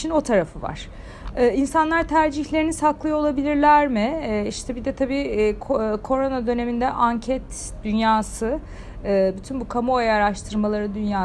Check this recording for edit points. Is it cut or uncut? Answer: uncut